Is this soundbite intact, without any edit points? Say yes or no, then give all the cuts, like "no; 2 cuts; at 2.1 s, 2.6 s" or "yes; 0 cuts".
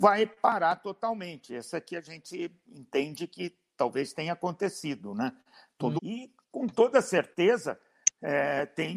no; 1 cut; at 6.0 s